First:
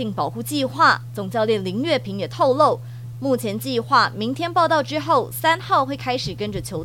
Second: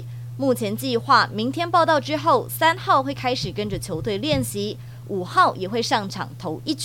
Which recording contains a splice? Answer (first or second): first